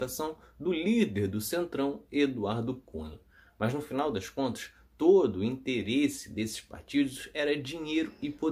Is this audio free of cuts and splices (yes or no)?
yes